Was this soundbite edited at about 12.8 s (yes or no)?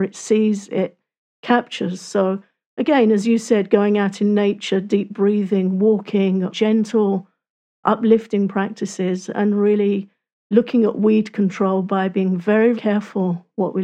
yes